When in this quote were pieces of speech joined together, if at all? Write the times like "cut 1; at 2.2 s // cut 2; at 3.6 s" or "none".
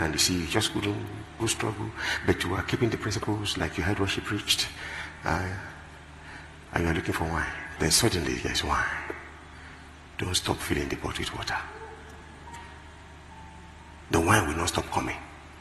cut 1; at 1.4 s // cut 2; at 6.7 s // cut 3; at 7.8 s